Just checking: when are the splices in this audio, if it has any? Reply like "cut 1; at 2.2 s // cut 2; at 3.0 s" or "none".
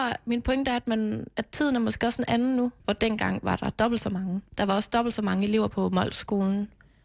cut 1; at 2.8 s // cut 2; at 4.5 s

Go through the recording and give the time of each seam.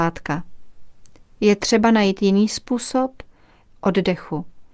cut 1; at 3.7 s

